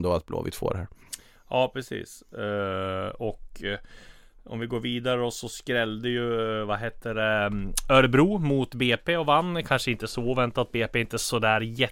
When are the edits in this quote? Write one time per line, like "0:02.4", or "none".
none